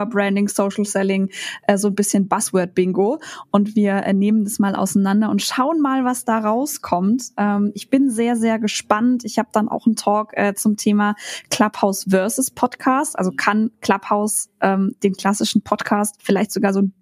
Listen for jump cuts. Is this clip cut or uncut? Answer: uncut